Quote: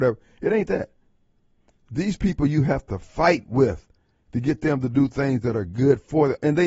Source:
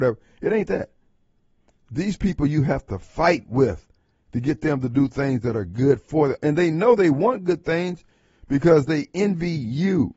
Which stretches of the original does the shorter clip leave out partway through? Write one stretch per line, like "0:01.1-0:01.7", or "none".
none